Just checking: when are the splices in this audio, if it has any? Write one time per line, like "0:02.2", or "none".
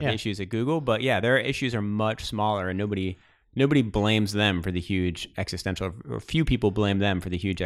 none